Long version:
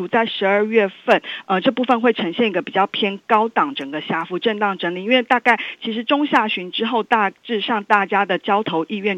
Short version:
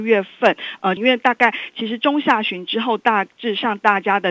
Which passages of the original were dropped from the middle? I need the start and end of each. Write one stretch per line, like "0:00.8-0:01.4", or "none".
0:01.6-0:05.0